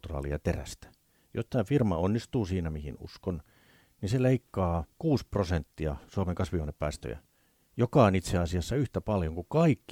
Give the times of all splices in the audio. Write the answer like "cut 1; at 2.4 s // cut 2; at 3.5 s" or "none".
cut 1; at 4.9 s

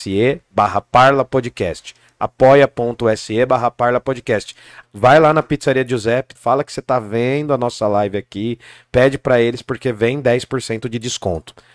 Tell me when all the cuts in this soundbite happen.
cut 1; at 4.8 s // cut 2; at 6.4 s

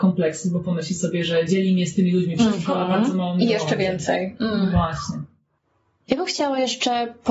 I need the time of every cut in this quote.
none

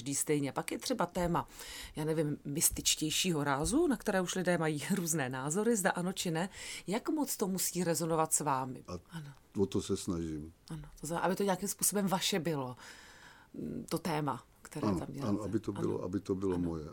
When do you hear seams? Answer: cut 1; at 8.9 s

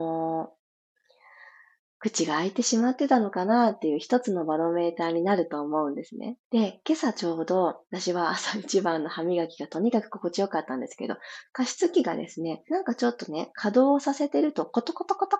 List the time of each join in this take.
cut 1; at 6.4 s // cut 2; at 11.4 s // cut 3; at 12.7 s

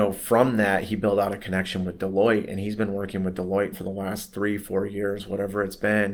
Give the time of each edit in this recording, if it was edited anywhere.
cut 1; at 3.7 s

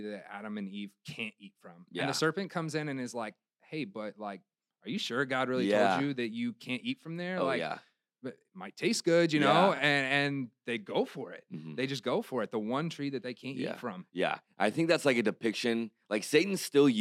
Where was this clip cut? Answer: none

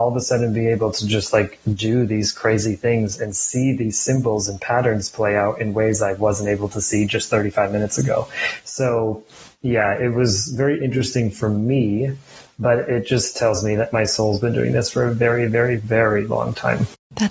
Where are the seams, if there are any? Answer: none

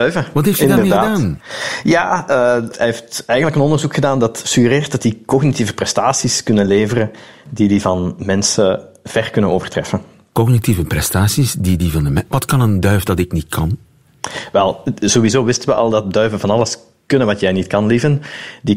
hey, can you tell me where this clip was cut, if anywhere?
none

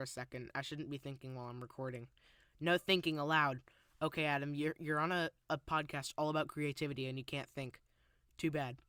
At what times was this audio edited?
none

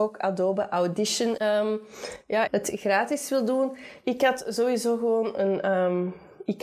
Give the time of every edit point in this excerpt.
cut 1; at 1.4 s // cut 2; at 2.5 s

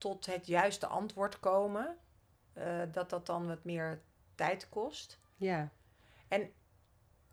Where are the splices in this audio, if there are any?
none

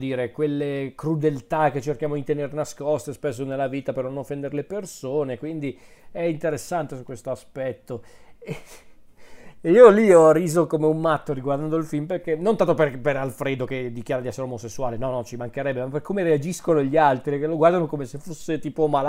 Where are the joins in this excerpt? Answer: cut 1; at 8.4 s

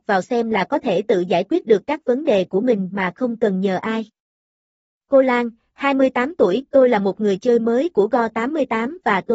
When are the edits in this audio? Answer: none

